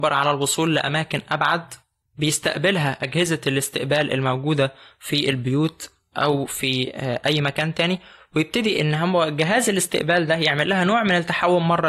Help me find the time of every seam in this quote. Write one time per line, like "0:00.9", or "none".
none